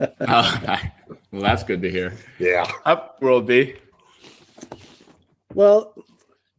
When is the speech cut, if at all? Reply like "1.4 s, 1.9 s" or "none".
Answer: 3.2 s